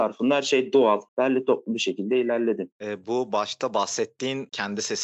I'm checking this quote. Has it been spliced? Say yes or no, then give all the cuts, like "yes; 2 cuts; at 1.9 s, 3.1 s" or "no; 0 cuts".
yes; 2 cuts; at 1.1 s, 2.7 s